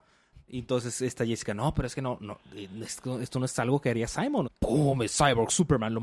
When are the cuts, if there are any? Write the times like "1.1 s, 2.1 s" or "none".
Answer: 4.4 s